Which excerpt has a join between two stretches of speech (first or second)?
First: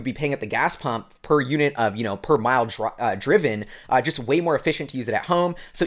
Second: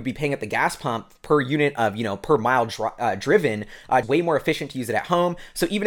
second